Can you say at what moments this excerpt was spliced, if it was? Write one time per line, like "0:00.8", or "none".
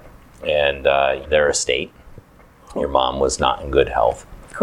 0:01.2